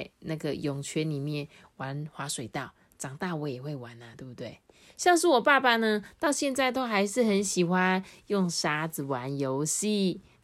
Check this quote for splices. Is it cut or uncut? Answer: uncut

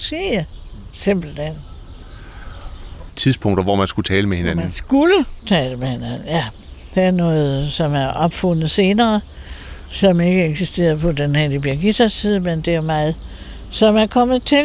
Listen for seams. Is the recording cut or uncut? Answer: cut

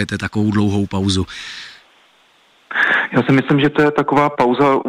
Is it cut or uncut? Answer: uncut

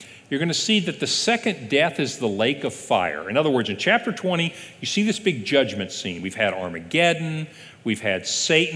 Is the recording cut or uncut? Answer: uncut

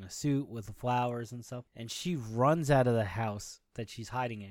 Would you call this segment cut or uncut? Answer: uncut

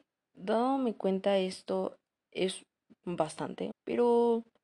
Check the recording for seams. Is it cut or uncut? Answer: cut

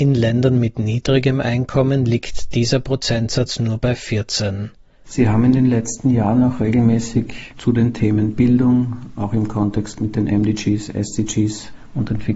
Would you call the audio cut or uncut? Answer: cut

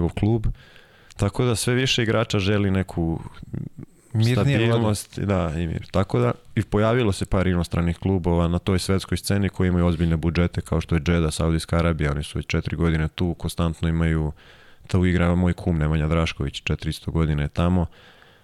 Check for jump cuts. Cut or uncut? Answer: uncut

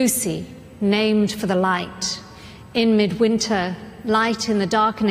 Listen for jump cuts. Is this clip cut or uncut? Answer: uncut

